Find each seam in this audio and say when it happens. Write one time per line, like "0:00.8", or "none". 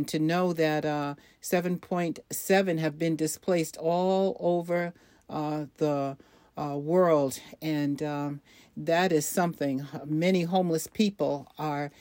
none